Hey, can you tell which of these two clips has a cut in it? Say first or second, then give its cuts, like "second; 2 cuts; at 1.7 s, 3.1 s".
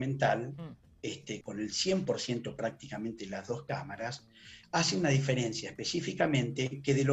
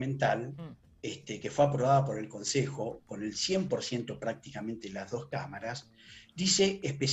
first; 2 cuts; at 1.4 s, 4.6 s